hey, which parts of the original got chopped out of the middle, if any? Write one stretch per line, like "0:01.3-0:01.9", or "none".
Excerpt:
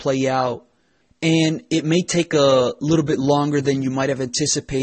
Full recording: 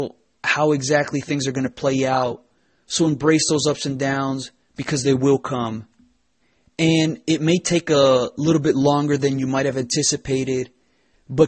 0:02.8-0:06.6